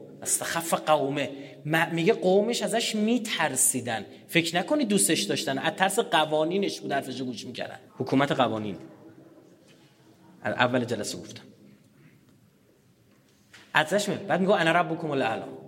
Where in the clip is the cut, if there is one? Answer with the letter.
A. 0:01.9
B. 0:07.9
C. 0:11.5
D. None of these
B